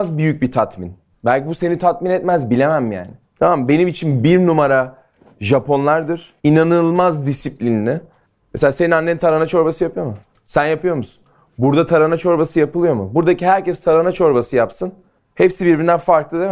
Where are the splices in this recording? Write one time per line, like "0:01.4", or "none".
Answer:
0:03.2
0:06.4